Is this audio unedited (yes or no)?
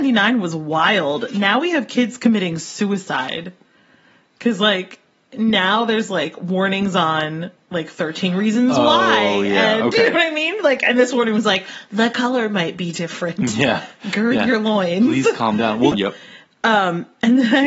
no